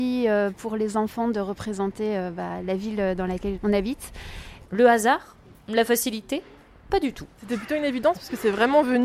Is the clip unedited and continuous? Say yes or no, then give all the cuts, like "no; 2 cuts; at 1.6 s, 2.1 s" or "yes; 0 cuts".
no; 2 cuts; at 3.6 s, 4.6 s